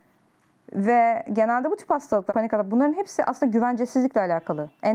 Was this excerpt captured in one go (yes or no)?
no